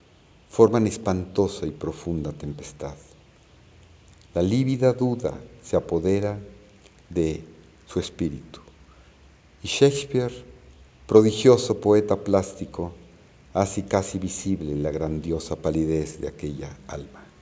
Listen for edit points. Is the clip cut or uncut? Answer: uncut